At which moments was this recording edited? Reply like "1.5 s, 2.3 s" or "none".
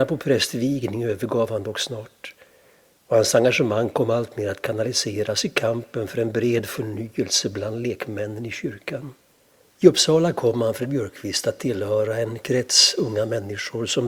9.6 s